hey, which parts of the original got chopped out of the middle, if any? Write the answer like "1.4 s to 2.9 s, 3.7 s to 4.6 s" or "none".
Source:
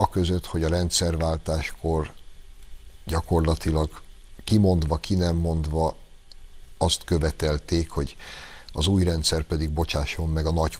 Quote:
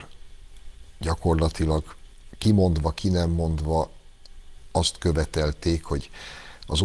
none